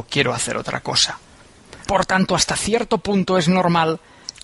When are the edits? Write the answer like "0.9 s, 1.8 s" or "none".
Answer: 1.9 s